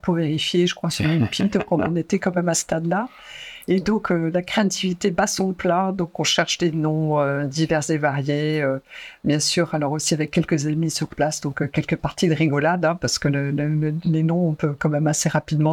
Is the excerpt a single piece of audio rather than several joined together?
yes; 0 cuts

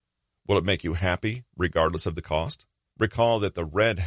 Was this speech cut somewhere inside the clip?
yes; 1 cut; at 2.8 s

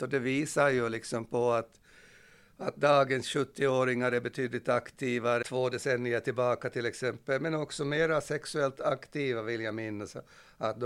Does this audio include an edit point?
yes; 1 cut; at 5.4 s

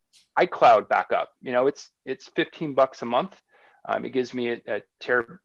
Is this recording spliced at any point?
no; 0 cuts

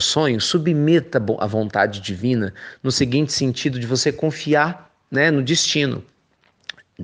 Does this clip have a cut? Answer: no; 0 cuts

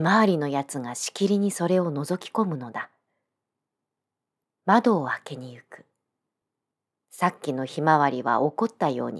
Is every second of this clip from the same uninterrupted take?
no; 1 cut; at 4.4 s

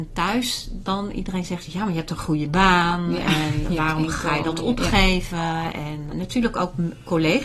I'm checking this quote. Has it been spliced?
yes; 1 cut; at 6.1 s

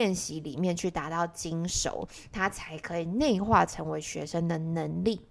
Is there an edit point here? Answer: no; 0 cuts

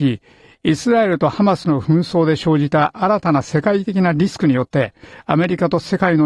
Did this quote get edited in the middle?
no; 0 cuts

